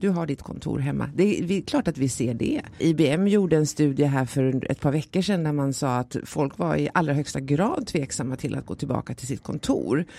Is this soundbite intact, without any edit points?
no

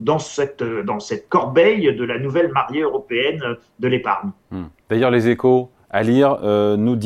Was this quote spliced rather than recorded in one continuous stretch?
no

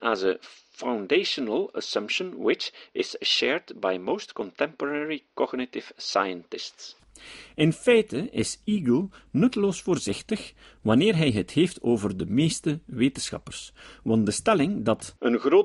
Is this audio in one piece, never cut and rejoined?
yes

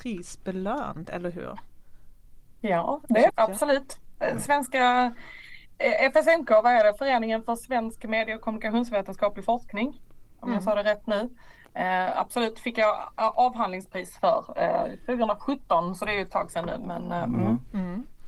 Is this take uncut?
no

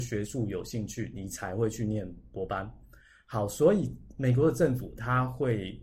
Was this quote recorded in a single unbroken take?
yes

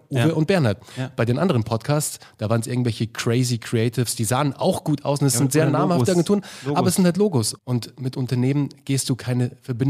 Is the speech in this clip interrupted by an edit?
yes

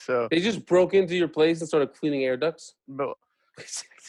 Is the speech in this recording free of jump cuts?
no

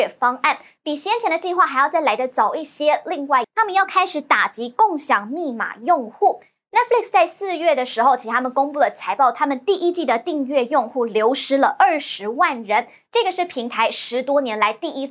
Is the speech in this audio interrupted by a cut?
yes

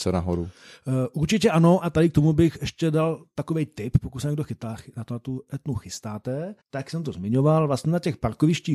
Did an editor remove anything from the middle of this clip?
yes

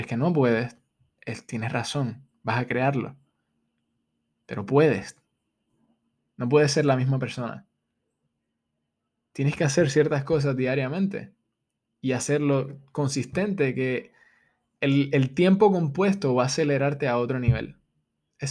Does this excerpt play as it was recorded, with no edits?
no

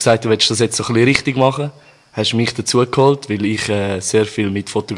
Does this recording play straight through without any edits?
yes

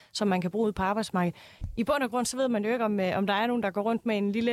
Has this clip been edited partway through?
no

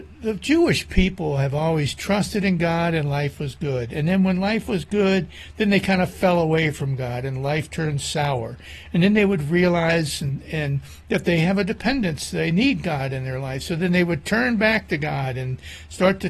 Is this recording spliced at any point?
no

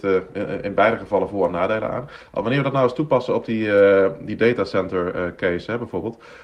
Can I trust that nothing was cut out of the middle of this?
yes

